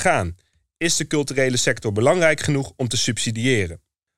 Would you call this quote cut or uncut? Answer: uncut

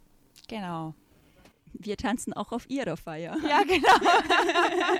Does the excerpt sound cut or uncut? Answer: uncut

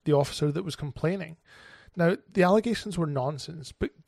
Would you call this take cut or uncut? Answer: uncut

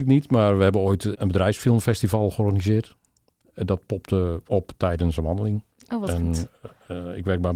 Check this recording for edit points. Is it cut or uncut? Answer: cut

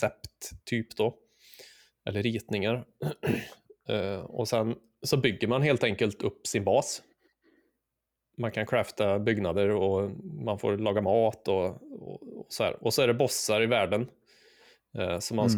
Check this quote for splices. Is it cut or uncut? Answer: uncut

